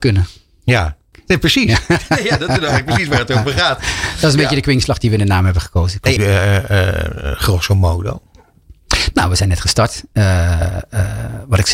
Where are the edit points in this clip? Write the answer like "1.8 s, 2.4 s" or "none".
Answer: 1.1 s, 6.2 s